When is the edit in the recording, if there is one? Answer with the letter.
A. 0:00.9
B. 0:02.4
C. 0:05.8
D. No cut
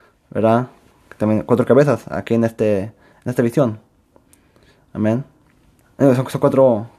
C